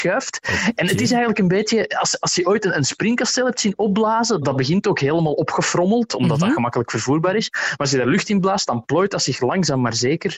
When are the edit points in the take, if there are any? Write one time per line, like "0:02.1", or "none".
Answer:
0:04.4